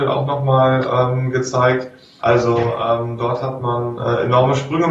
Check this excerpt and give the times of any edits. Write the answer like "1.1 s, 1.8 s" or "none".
2.2 s